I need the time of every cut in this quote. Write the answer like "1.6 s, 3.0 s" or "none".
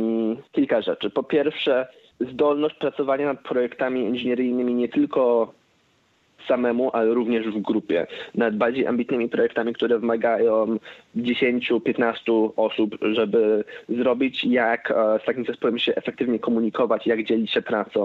none